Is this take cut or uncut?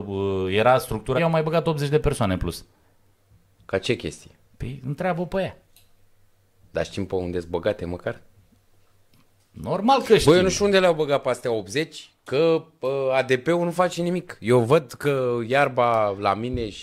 cut